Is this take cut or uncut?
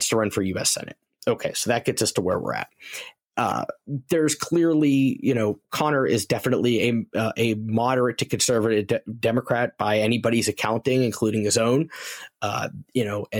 uncut